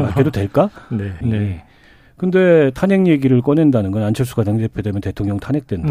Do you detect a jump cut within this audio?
yes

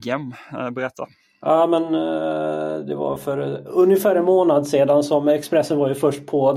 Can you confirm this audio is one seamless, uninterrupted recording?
yes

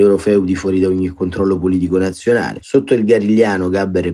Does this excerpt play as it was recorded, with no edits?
no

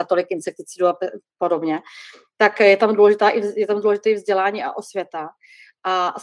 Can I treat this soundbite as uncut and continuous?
yes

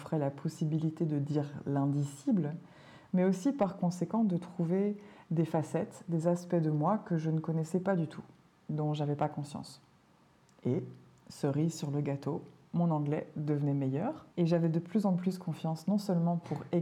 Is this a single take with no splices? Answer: no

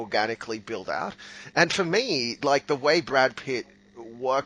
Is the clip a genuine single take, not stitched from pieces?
yes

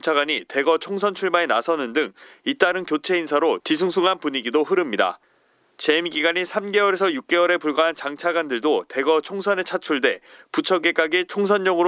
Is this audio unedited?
yes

